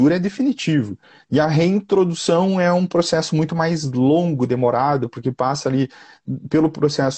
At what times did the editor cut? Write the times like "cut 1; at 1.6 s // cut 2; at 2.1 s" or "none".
cut 1; at 1.2 s